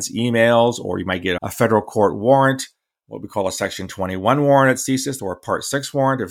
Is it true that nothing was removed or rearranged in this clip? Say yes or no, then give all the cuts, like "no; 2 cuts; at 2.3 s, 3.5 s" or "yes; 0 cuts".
no; 2 cuts; at 1.4 s, 5.2 s